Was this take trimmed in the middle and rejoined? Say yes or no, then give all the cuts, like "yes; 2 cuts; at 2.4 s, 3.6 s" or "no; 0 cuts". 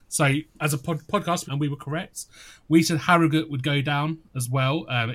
yes; 1 cut; at 1.5 s